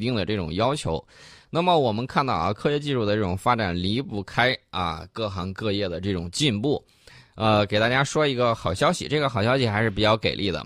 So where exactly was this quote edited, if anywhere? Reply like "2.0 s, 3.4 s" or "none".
none